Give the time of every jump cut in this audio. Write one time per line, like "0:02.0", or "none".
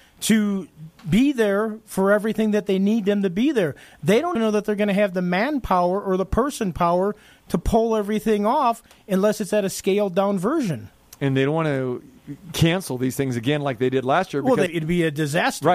0:04.4
0:14.7

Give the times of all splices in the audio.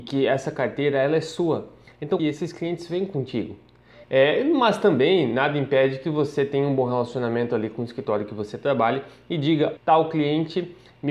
0:02.2
0:04.0
0:09.8

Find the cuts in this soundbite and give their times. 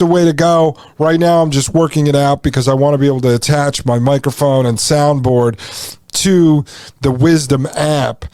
none

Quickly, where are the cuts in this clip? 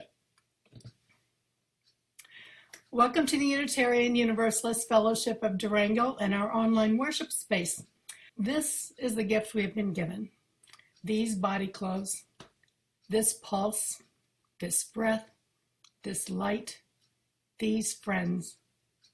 0:08.3
0:12.9

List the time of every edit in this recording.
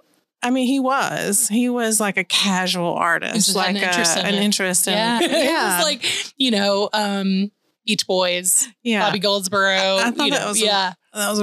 0:05.2

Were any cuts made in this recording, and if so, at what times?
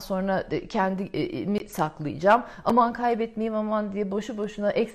none

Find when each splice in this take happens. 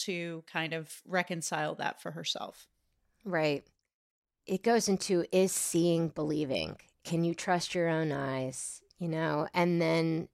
none

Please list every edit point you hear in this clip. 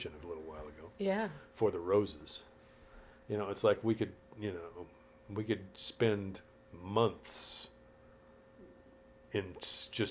none

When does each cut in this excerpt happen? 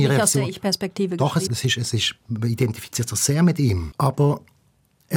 0:01.5
0:03.9

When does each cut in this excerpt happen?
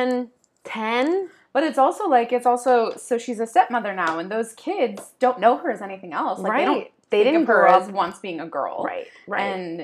none

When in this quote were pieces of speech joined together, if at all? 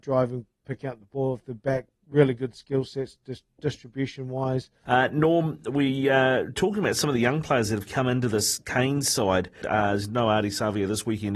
0:04.8
0:09.6

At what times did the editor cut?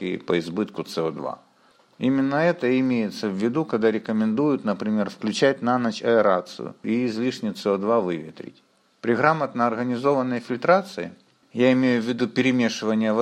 0:06.8

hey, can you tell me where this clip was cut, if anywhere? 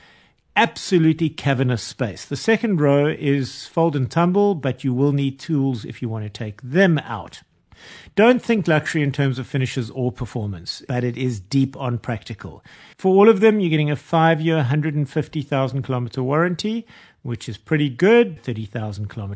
0:12.9
0:18.4

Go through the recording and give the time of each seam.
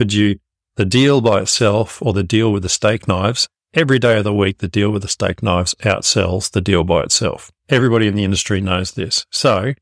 0:07.6

